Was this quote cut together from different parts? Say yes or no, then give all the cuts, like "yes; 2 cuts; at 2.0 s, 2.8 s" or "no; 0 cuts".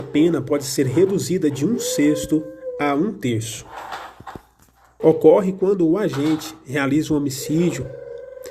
yes; 1 cut; at 5.0 s